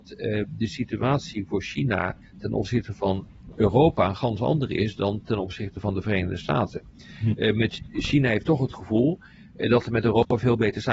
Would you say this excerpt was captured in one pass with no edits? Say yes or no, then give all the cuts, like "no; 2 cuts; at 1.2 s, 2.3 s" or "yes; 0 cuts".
yes; 0 cuts